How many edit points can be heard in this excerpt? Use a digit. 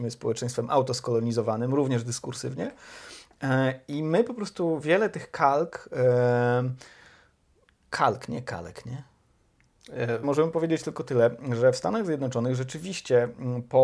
1